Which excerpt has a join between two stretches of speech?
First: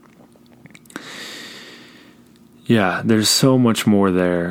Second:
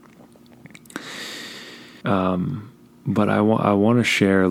second; 1 cut; at 2.0 s

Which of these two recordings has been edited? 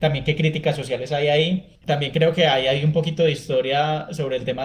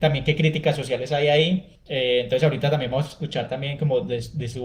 first; 1 cut; at 1.8 s

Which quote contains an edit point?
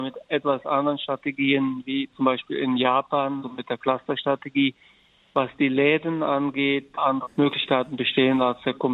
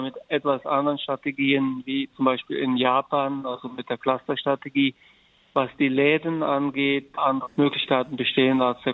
first; 1 cut; at 3.4 s

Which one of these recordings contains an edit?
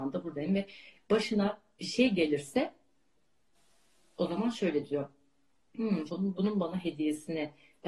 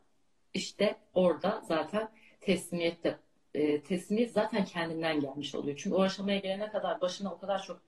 first; 1 cut; at 6.1 s

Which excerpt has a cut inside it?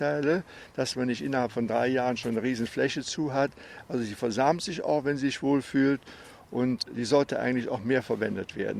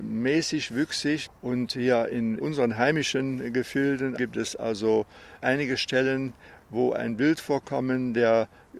second; 2 cuts; at 1.3 s, 4.2 s

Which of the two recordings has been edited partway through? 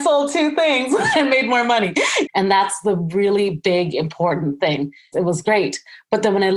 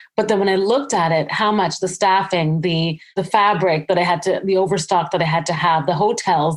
first; 2 cuts; at 2.2 s, 5.1 s

